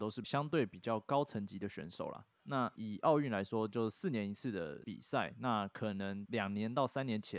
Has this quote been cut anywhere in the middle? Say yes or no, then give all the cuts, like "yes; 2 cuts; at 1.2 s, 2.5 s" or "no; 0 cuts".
yes; 1 cut; at 2.4 s